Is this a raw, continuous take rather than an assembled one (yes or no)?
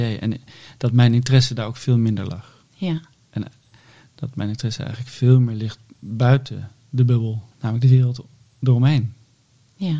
no